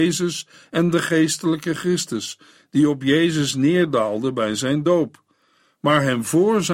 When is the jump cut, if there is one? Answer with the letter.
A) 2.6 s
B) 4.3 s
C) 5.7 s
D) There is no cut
D